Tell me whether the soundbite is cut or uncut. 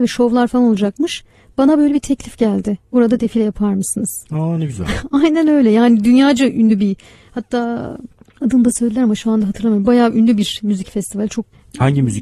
uncut